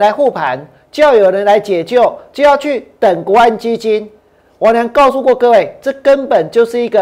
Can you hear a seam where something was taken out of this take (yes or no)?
no